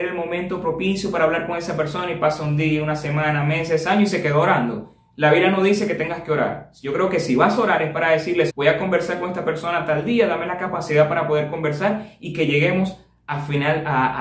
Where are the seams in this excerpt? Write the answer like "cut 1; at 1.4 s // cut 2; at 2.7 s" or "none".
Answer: cut 1; at 8.5 s